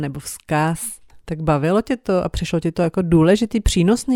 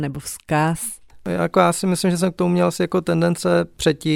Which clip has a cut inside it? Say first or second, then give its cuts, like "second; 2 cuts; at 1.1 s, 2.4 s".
first; 1 cut; at 1.2 s